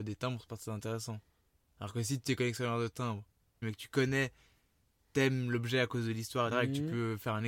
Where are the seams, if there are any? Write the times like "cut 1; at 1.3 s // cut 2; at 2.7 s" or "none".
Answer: cut 1; at 3.6 s // cut 2; at 6.5 s